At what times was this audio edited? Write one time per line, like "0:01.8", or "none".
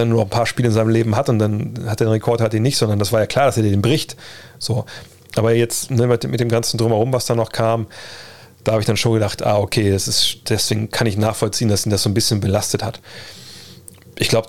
none